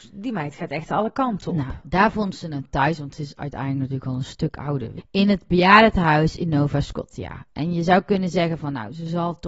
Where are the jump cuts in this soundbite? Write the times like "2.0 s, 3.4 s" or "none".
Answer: 5.0 s